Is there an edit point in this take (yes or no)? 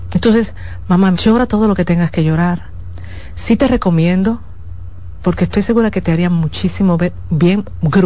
yes